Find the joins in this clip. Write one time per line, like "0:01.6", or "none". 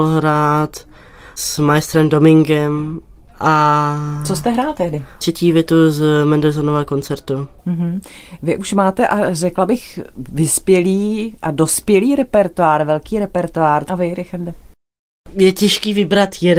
0:13.9